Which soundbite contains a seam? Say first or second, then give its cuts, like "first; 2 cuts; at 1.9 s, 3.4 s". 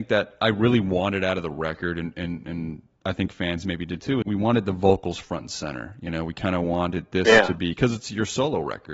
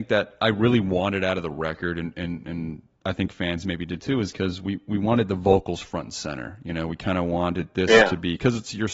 first; 1 cut; at 4.2 s